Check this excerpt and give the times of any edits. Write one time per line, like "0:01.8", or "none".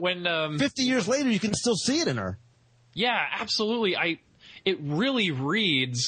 none